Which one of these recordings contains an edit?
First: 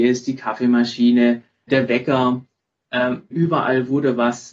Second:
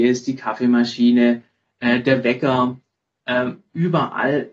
first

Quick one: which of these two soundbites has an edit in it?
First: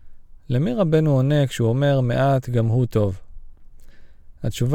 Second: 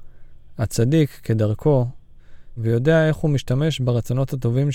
second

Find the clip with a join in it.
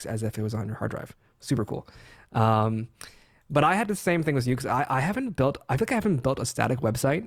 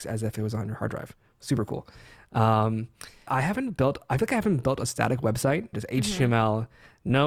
second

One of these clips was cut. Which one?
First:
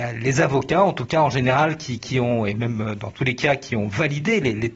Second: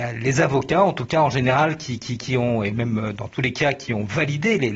first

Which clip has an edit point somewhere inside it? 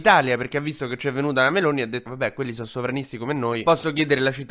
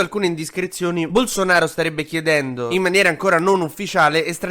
first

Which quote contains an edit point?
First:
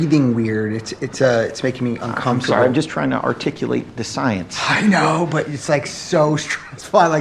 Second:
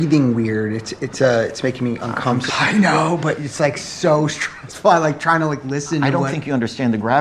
second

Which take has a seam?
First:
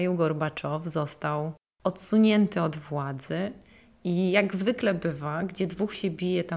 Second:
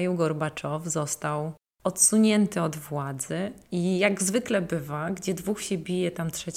second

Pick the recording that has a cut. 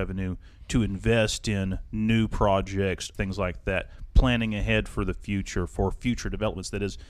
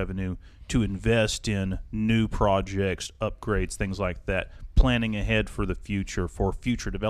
first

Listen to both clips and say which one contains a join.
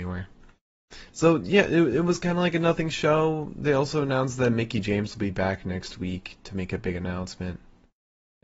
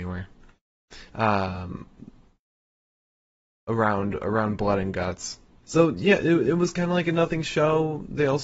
second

